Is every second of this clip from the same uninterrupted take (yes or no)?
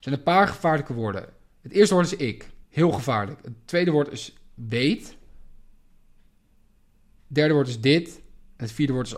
no